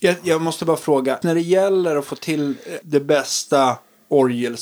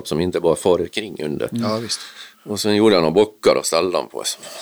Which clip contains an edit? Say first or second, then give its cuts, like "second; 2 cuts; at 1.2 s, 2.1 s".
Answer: first; 2 cuts; at 1.2 s, 2.8 s